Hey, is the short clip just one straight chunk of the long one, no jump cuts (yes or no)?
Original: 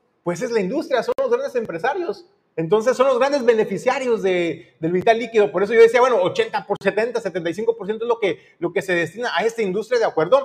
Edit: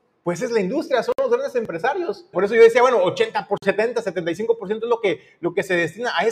no